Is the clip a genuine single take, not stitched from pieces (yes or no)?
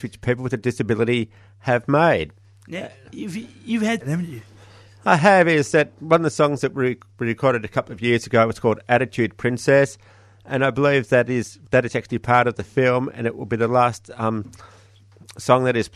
no